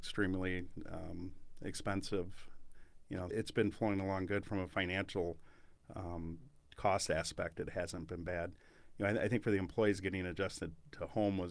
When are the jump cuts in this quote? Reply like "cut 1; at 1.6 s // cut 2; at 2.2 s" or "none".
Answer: cut 1; at 3.3 s